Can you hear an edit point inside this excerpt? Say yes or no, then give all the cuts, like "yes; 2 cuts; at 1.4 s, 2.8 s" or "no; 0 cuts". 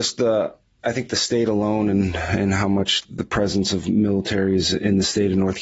no; 0 cuts